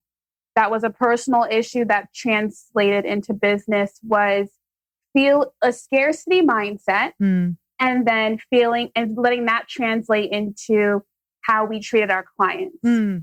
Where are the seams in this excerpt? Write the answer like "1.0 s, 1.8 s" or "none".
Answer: none